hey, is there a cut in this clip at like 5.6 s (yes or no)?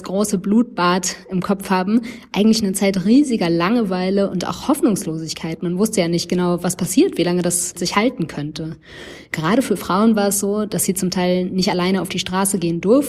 no